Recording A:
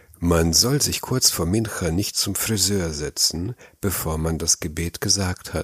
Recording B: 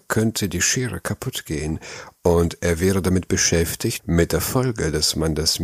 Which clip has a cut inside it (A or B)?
B